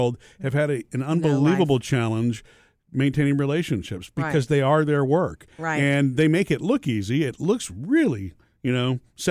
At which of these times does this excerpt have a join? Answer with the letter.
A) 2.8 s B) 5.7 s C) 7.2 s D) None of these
D